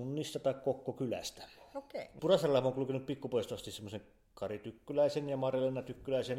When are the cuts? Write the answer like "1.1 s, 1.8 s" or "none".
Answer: 2.2 s